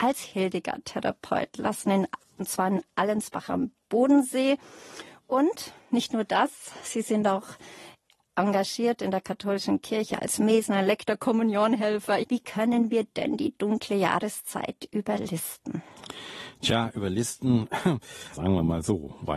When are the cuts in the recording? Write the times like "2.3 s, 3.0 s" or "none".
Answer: 12.2 s, 18.3 s